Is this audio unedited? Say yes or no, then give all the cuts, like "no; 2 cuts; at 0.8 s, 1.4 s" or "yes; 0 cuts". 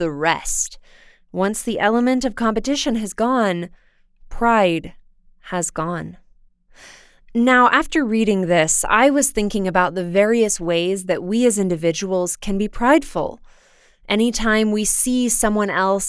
yes; 0 cuts